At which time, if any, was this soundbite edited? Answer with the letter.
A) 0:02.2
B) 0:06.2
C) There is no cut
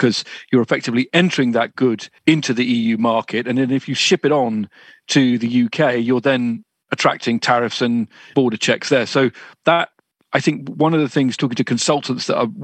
A